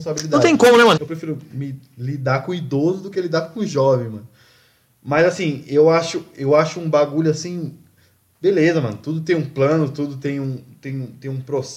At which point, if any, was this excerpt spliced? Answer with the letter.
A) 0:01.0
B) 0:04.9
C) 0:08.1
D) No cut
A